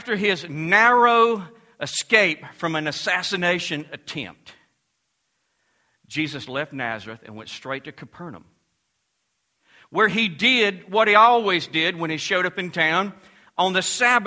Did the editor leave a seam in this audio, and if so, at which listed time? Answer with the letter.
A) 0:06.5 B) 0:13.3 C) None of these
A